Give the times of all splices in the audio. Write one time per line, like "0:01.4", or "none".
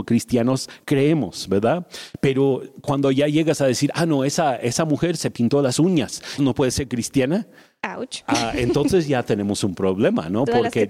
0:06.4